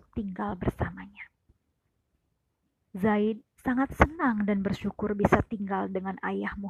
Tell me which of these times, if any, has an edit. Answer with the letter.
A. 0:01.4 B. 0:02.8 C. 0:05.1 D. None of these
B